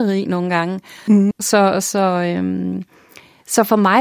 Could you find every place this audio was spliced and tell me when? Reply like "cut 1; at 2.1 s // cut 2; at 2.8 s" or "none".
cut 1; at 1.3 s